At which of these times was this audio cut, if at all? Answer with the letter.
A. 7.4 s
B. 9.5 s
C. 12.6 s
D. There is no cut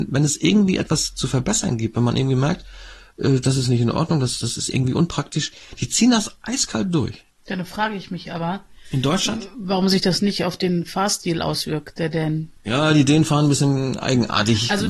D